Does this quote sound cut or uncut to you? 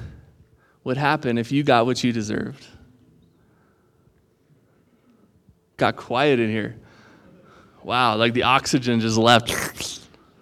uncut